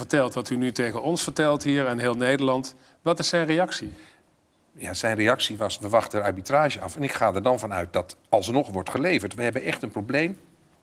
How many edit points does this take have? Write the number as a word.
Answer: one